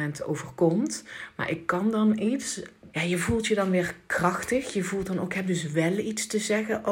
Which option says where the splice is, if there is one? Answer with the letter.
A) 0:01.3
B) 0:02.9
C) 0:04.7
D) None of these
B